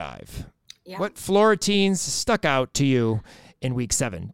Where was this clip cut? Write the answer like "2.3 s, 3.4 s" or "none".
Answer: none